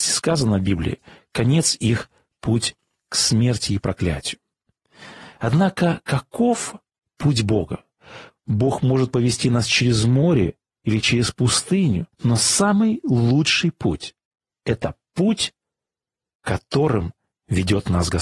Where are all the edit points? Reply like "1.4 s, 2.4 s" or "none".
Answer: 8.5 s, 12.1 s